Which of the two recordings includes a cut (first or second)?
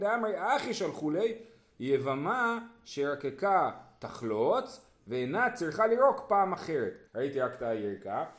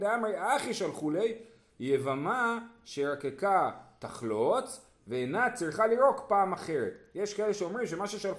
first